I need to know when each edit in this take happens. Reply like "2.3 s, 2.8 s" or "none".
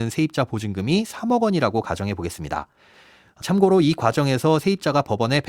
3.4 s